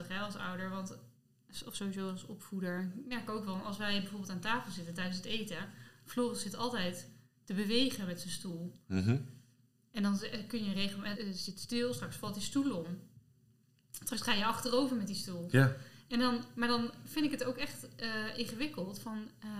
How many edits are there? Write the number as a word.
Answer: one